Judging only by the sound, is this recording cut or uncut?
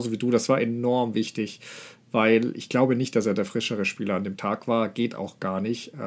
uncut